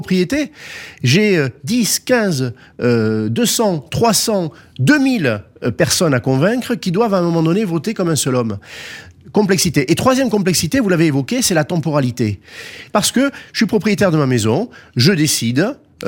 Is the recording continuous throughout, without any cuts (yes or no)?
no